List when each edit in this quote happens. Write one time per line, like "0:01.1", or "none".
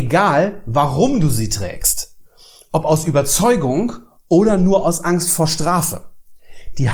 none